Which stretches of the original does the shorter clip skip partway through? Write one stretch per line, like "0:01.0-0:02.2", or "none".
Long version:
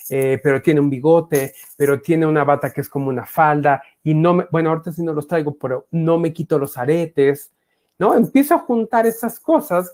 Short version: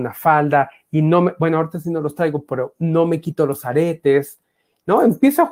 none